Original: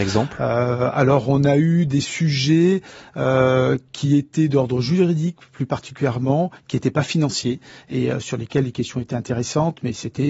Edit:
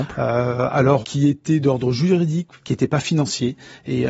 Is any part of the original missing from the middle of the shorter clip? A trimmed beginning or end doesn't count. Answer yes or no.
yes